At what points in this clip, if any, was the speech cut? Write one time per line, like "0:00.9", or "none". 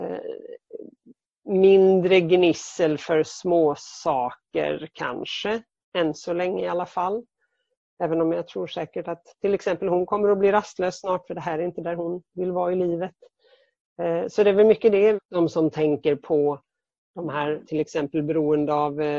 0:15.2
0:17.6